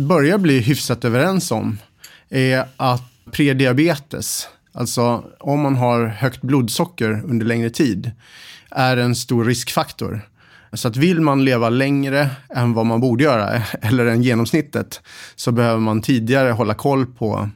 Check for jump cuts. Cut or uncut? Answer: cut